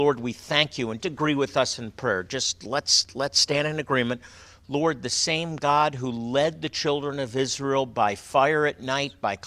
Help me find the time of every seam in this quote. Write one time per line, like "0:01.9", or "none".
0:01.0
0:04.5